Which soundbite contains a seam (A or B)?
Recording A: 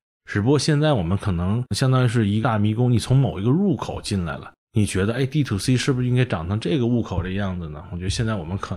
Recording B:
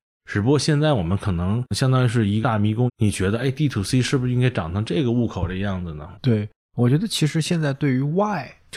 B